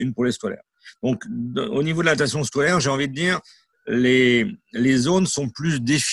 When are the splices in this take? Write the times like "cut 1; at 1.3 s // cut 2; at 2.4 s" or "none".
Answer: none